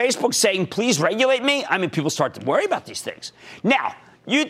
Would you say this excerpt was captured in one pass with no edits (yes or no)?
yes